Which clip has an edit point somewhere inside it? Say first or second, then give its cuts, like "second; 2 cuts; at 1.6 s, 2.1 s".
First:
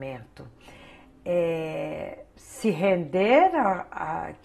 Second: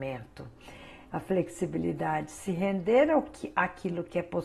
second; 1 cut; at 1.1 s